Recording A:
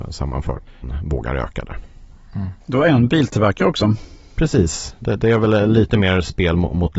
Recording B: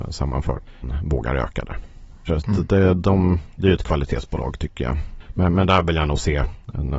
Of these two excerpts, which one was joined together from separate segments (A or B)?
B